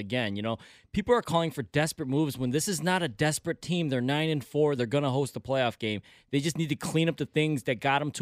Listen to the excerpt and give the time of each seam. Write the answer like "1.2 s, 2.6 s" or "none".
4.8 s